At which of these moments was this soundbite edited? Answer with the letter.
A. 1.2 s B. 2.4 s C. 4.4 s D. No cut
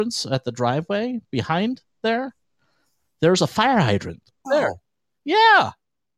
C